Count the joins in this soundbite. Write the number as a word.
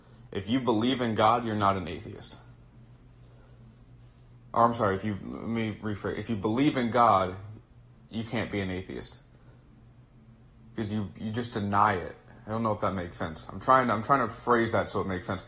zero